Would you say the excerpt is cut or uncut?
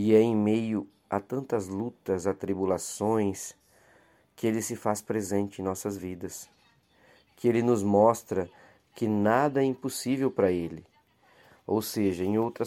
uncut